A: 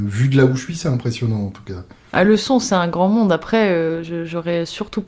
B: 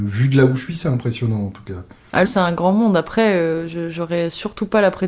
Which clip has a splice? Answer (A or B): B